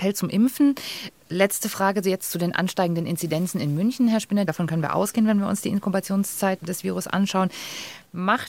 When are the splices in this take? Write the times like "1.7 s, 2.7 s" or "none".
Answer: 4.5 s